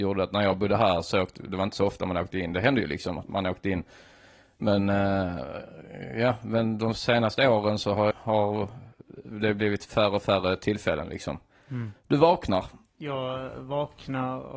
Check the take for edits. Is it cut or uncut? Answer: cut